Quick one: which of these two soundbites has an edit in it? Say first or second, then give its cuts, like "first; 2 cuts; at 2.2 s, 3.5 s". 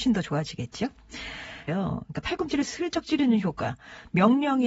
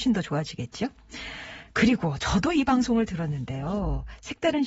first; 1 cut; at 1.7 s